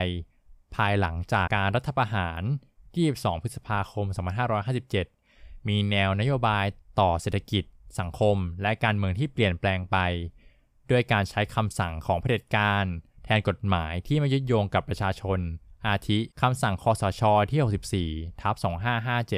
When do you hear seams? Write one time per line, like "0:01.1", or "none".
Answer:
0:01.5
0:16.3